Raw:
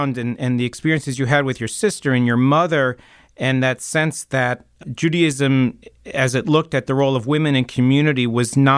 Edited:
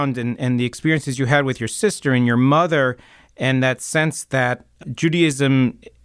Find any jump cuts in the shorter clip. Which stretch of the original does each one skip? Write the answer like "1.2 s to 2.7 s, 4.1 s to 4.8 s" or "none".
none